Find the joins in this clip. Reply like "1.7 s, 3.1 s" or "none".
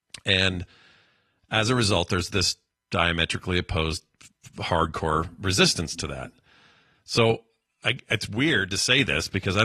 none